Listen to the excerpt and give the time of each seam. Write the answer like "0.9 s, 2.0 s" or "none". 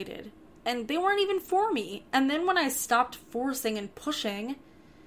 none